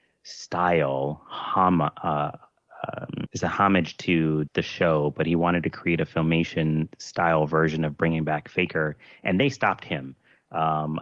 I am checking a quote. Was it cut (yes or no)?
yes